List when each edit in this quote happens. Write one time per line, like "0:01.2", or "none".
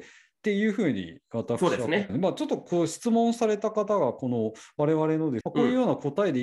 0:02.1
0:05.4